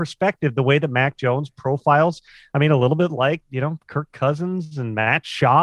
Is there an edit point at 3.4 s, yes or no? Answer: yes